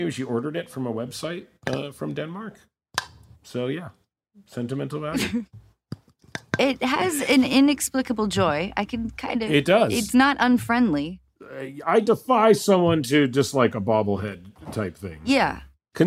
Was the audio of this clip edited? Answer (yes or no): no